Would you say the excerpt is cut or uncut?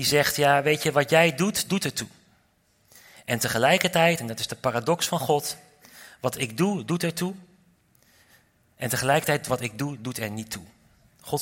uncut